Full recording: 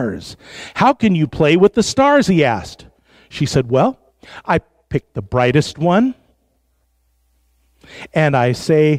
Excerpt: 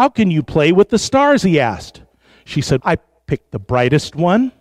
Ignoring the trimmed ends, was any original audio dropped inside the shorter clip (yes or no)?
yes